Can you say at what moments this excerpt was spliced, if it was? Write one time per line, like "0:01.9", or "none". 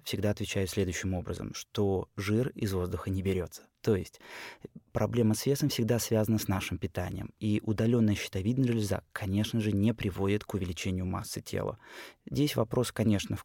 none